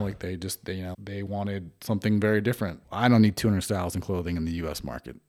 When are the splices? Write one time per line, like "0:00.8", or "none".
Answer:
0:00.9
0:02.8